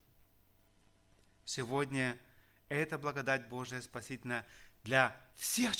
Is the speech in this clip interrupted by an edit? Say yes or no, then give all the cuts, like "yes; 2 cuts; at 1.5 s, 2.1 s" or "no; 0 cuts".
no; 0 cuts